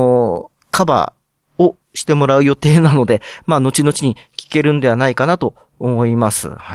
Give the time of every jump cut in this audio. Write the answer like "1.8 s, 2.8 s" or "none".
none